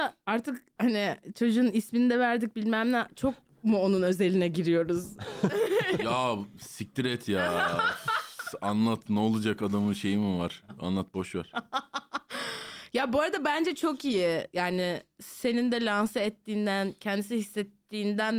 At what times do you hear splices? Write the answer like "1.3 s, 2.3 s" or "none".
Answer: none